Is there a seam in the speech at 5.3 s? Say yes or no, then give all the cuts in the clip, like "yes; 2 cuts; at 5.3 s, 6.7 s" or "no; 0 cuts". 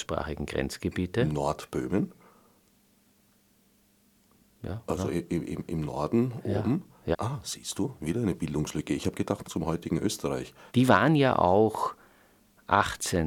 no; 3 cuts; at 7.1 s, 9.4 s, 10.7 s